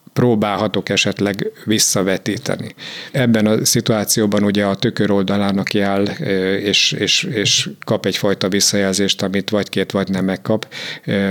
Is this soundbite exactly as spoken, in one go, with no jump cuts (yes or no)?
no